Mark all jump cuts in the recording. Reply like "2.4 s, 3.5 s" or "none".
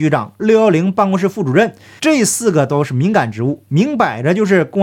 2.0 s